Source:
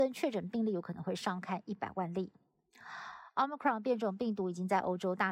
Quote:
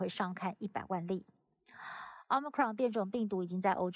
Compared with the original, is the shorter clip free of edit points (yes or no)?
yes